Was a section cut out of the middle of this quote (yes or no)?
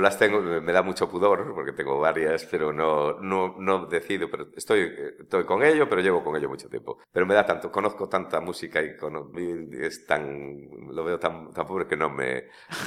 yes